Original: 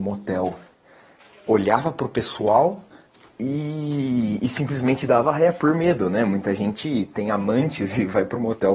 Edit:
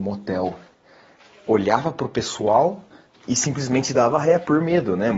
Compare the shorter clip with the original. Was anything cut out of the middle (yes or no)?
yes